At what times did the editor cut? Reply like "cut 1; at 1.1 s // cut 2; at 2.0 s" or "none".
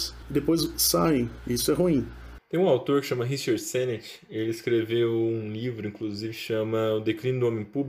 cut 1; at 1.4 s